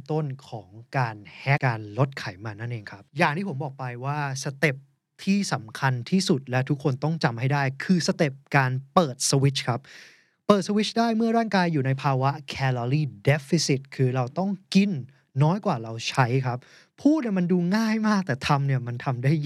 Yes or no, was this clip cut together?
yes